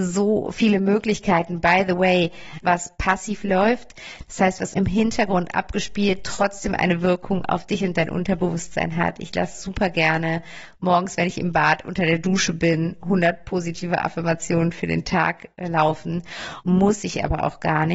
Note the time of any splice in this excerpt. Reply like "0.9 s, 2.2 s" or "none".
2.6 s, 4.7 s, 16.6 s